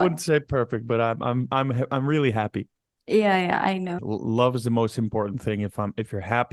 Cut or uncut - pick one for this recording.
cut